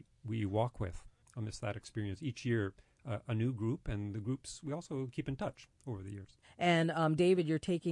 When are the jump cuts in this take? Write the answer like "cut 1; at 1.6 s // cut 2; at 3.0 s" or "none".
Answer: cut 1; at 1.2 s

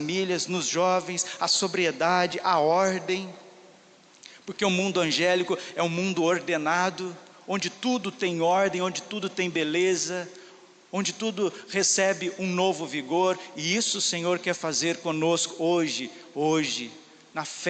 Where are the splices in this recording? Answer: none

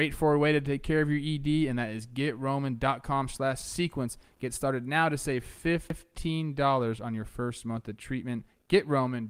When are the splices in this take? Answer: none

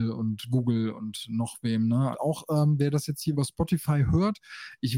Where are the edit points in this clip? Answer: cut 1; at 2.1 s // cut 2; at 3.3 s

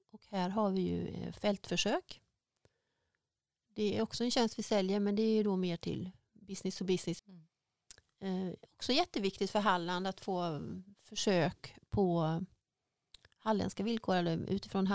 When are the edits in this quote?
cut 1; at 7.2 s

